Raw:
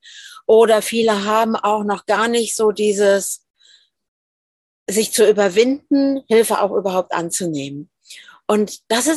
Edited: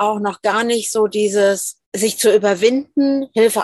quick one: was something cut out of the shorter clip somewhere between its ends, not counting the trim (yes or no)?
yes